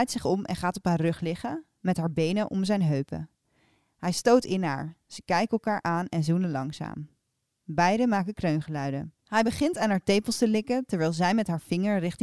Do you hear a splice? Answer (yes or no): yes